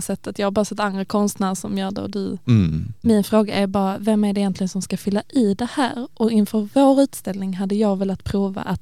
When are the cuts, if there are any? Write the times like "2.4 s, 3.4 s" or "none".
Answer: 3.0 s